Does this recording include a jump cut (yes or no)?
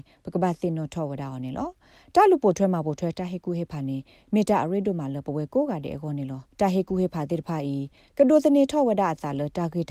yes